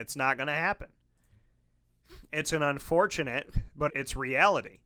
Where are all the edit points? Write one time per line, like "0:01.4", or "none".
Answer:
0:03.9